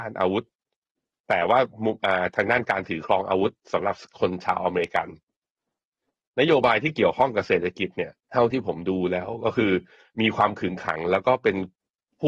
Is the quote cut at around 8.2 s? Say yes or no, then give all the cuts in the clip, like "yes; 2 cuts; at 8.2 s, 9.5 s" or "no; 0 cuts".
yes; 1 cut; at 8.2 s